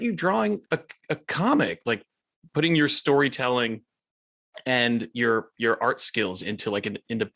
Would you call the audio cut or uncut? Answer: uncut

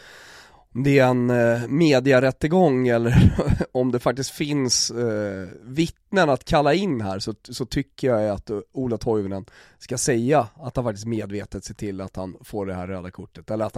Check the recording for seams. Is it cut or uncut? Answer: uncut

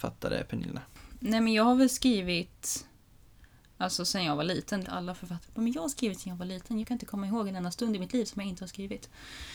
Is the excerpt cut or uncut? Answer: cut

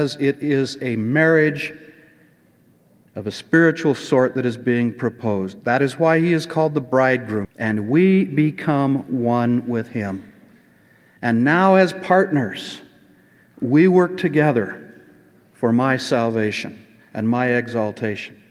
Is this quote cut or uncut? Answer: cut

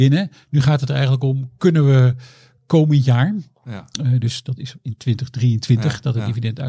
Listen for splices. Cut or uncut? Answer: cut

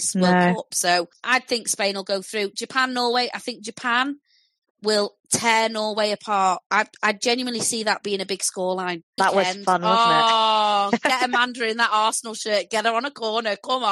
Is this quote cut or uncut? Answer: cut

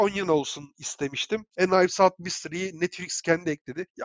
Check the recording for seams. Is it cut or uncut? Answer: uncut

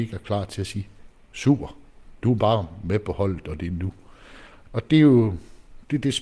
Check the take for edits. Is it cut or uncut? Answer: cut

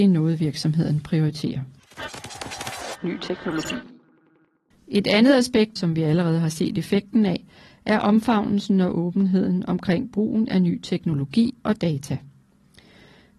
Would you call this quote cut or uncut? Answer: cut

